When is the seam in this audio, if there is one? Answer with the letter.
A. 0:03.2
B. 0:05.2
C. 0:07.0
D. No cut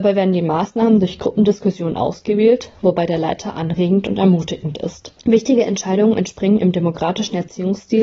B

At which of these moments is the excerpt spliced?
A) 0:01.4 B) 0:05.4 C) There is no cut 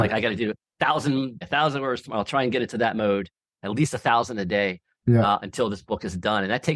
A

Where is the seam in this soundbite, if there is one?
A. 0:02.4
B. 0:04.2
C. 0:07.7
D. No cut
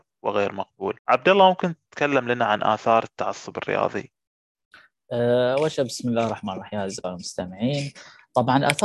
D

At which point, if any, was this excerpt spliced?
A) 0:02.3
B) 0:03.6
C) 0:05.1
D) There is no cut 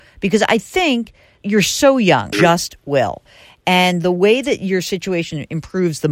A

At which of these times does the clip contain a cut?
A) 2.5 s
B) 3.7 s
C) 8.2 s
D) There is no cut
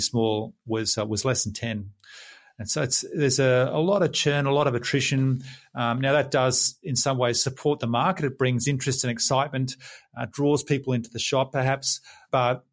D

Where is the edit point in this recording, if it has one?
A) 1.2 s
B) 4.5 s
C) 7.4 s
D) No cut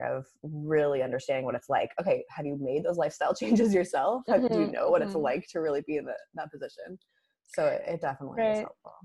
D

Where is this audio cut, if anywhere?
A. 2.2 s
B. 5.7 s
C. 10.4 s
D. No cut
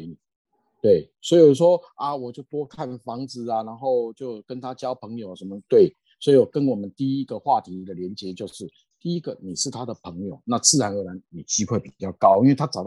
D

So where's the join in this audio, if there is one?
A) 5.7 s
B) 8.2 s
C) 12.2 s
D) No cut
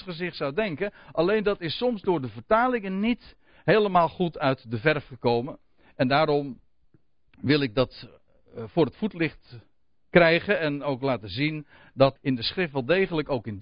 C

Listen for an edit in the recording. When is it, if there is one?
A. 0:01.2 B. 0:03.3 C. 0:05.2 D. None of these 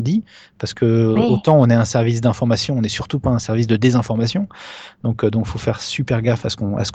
D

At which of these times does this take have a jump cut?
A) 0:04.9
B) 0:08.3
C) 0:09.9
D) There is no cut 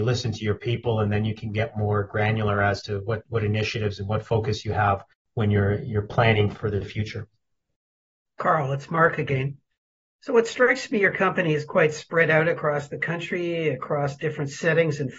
D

